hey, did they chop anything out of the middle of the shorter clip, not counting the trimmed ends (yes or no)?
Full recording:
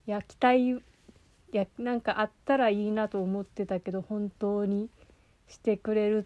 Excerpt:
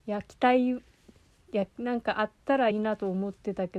yes